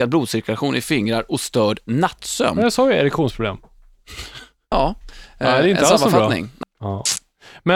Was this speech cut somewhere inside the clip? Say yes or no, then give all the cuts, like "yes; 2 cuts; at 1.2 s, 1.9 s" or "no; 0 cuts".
yes; 2 cuts; at 4.7 s, 6.6 s